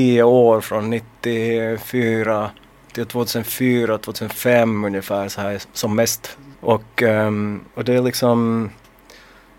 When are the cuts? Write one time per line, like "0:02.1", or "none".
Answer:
0:06.5
0:07.7